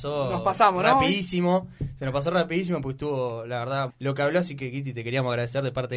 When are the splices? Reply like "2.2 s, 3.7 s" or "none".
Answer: 3.9 s